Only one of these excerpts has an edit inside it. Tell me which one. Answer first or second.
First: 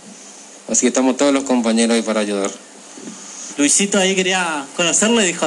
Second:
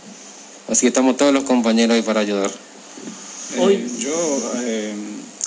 first